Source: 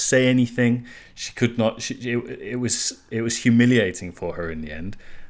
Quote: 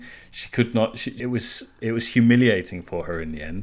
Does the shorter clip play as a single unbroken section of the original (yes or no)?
no